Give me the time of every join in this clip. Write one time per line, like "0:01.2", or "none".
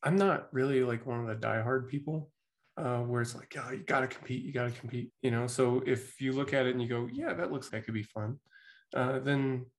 0:05.1
0:07.7